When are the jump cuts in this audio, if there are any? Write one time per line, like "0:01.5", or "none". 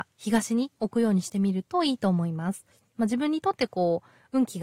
0:02.9